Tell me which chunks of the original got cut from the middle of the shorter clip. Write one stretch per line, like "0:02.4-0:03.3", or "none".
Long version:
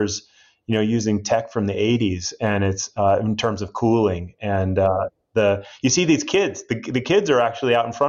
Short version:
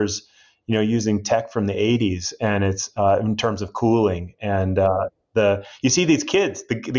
none